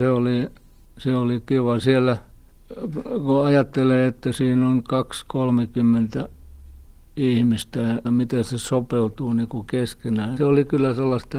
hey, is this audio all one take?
no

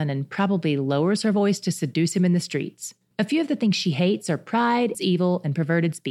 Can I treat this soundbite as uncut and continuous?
no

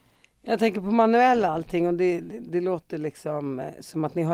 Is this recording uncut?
yes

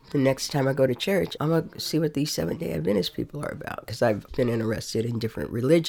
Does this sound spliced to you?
yes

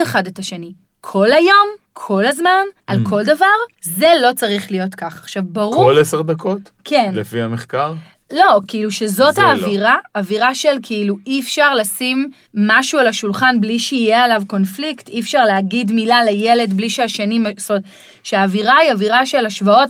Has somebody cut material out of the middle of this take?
no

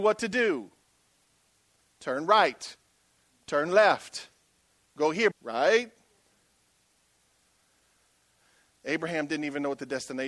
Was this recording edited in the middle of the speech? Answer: yes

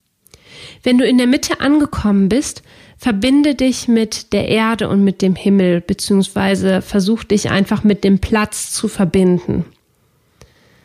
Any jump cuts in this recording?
no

